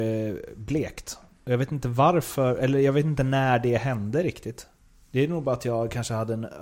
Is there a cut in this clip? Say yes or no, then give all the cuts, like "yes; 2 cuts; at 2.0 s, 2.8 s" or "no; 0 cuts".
no; 0 cuts